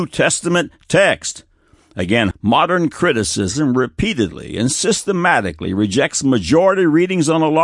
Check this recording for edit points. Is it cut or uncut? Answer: cut